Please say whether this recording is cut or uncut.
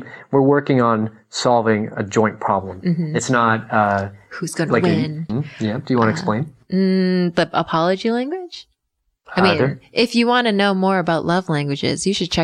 cut